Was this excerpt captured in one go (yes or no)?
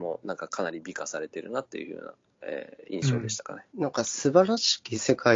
no